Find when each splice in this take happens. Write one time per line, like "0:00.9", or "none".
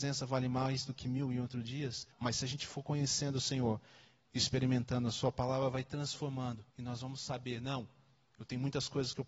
0:02.1
0:06.7